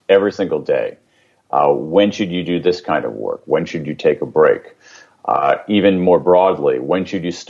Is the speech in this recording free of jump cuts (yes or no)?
no